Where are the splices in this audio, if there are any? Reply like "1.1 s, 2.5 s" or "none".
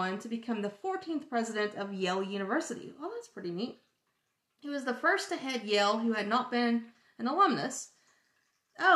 none